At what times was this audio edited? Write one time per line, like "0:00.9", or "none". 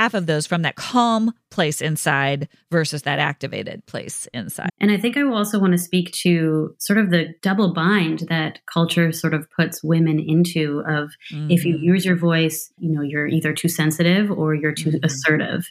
0:04.7
0:12.8